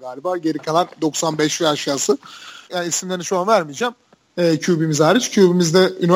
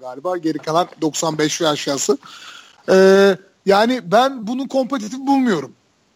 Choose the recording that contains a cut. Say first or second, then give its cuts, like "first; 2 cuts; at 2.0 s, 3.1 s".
first; 2 cuts; at 2.7 s, 4.3 s